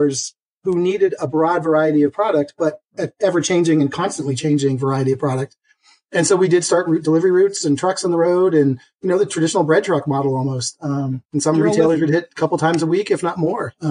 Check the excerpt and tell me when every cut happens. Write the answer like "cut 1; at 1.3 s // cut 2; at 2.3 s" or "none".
cut 1; at 11.3 s